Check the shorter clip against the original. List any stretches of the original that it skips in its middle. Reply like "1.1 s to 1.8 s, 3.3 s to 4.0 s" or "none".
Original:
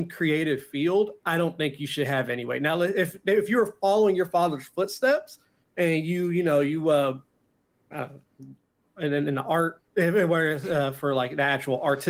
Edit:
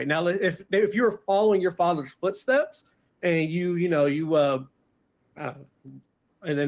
none